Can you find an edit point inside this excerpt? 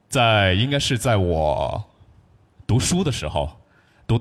no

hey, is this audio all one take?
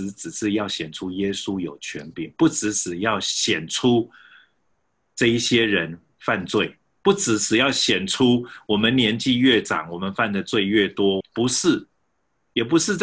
no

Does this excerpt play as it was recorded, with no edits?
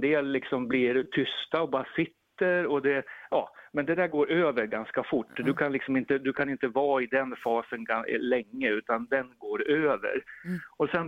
yes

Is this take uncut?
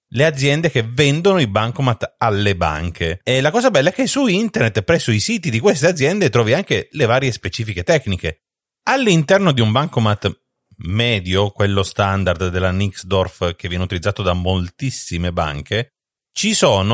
no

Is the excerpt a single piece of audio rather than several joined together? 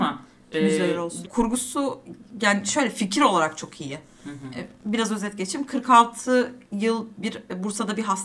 no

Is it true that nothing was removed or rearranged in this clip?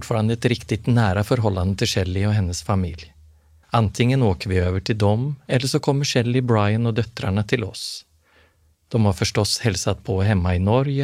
no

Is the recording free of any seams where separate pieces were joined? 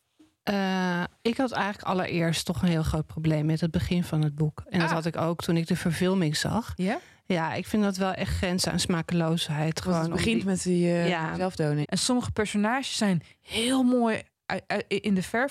no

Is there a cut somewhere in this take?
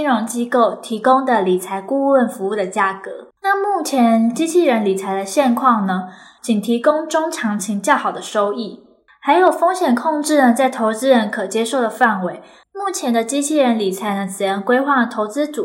yes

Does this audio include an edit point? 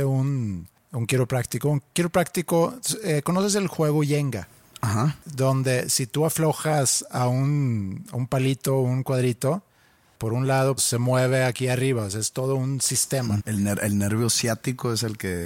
yes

